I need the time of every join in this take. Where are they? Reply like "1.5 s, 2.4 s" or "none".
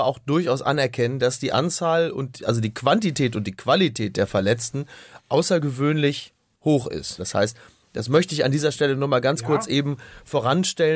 7.2 s